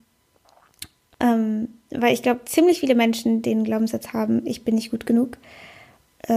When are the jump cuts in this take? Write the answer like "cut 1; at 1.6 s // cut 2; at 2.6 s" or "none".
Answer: cut 1; at 1.1 s

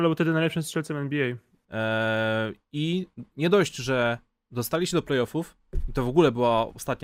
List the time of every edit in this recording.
cut 1; at 1.6 s

